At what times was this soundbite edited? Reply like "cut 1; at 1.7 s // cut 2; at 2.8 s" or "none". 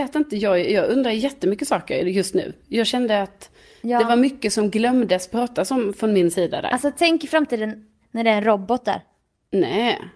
cut 1; at 8.0 s

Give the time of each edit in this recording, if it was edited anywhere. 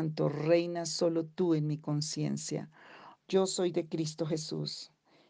cut 1; at 3.2 s

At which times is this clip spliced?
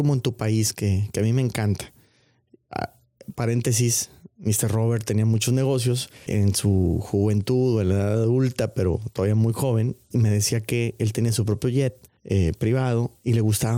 cut 1; at 6.3 s // cut 2; at 10.1 s // cut 3; at 12.2 s

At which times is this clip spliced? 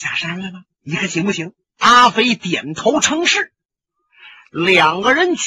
cut 1; at 1.8 s

